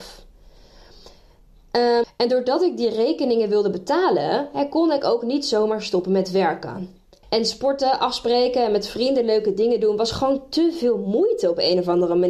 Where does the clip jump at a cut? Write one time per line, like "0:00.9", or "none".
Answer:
0:02.0
0:07.2